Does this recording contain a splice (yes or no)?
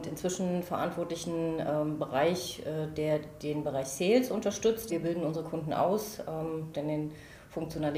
yes